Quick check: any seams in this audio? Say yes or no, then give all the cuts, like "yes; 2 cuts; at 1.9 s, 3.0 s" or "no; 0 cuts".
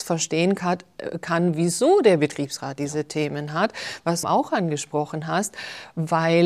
yes; 1 cut; at 4.2 s